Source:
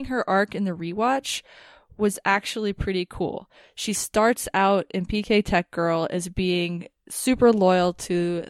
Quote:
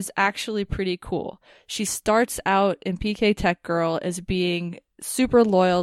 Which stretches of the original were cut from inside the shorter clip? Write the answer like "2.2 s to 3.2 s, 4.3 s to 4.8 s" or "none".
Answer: none